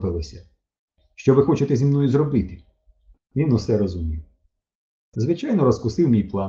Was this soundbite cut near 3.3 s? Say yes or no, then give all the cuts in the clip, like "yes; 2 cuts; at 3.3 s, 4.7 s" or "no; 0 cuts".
no; 1 cut; at 5.1 s